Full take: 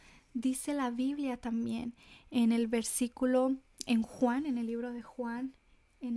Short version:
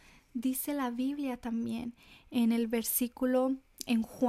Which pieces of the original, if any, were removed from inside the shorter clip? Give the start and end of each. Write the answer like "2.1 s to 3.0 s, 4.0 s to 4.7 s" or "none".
none